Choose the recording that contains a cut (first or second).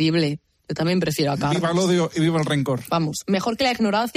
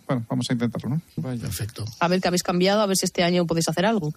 second